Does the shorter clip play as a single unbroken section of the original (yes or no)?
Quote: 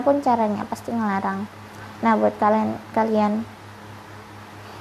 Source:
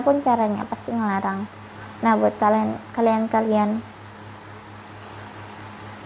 no